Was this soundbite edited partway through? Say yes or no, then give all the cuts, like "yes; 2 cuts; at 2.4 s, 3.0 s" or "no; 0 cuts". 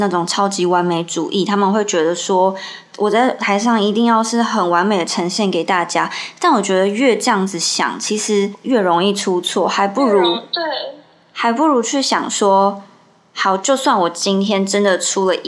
no; 0 cuts